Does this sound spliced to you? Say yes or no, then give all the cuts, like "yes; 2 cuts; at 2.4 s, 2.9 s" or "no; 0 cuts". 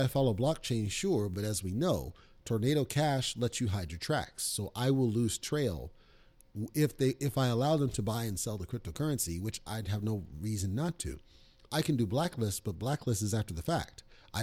no; 0 cuts